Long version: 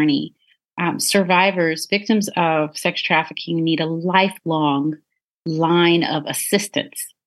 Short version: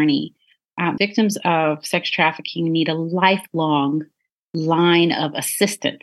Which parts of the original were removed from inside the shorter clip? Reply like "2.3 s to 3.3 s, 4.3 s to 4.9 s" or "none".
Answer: 1.0 s to 1.9 s